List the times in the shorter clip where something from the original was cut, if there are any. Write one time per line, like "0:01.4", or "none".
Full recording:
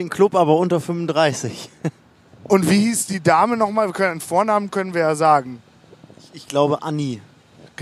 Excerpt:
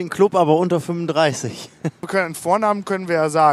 0:02.0